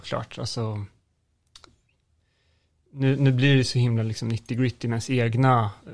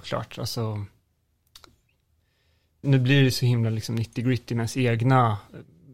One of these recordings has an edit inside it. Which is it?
second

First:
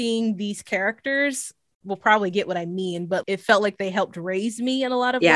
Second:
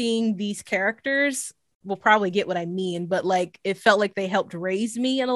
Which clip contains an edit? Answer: first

